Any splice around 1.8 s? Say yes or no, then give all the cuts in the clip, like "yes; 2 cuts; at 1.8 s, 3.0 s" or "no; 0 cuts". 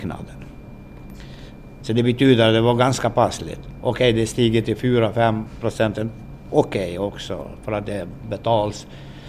yes; 1 cut; at 1.8 s